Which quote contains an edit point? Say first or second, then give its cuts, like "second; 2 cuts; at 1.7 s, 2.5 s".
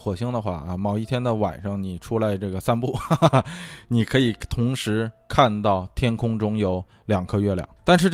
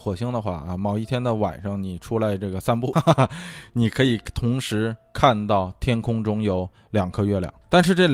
second; 1 cut; at 2.9 s